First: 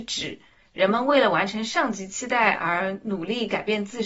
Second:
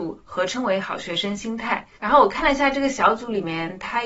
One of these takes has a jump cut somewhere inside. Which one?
second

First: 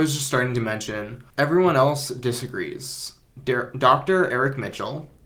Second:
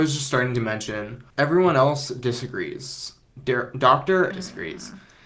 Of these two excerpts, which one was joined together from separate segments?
second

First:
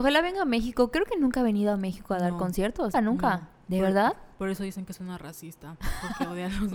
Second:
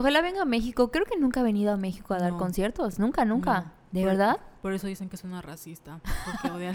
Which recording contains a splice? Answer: first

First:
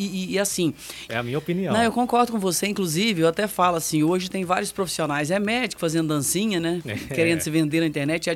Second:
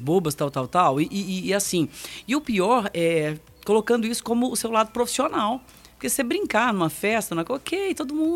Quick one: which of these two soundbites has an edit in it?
first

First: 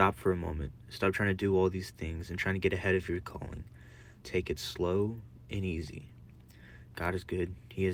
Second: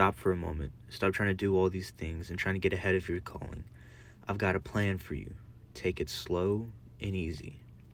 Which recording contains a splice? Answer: first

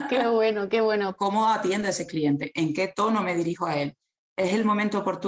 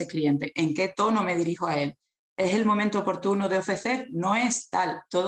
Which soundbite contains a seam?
first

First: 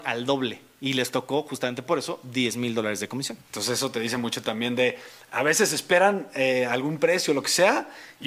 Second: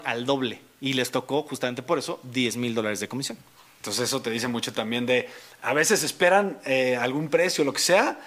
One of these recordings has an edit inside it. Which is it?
first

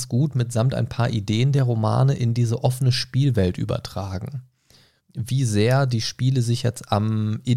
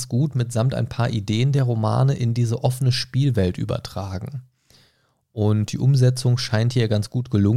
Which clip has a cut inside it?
first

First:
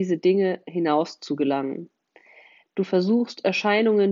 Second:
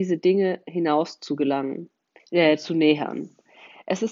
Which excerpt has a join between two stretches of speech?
second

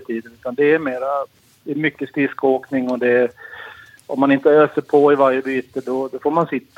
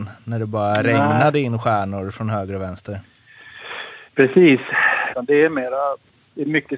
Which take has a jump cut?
second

